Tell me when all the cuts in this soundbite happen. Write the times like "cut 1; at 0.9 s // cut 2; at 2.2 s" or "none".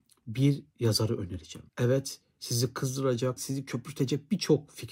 cut 1; at 1.7 s // cut 2; at 3.4 s